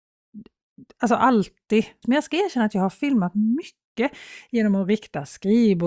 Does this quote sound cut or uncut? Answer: cut